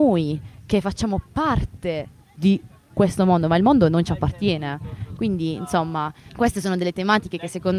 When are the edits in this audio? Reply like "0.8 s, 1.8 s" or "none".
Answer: 5.2 s, 6.3 s